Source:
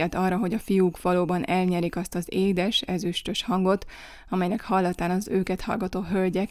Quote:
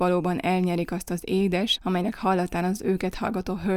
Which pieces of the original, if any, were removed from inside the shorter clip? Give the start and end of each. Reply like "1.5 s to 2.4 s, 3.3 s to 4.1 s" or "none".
2.8 s to 4.2 s